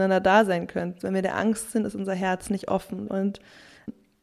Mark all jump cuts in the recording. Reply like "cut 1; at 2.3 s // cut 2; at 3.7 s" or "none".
cut 1; at 1.0 s // cut 2; at 3.1 s